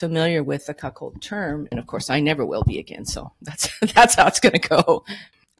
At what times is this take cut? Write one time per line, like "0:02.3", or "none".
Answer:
0:01.7